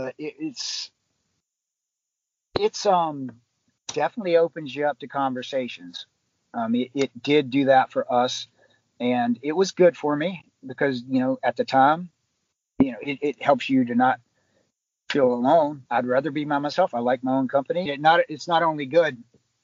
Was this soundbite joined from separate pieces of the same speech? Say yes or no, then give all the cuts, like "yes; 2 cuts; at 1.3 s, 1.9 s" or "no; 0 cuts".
yes; 2 cuts; at 15.9 s, 17.9 s